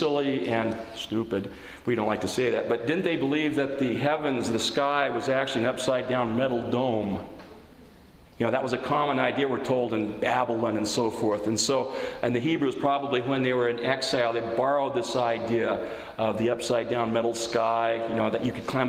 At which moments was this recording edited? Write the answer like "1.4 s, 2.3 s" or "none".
none